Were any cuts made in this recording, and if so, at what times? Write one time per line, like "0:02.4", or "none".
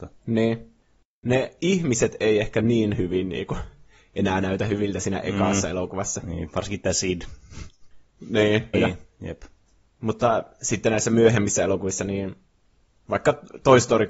0:08.7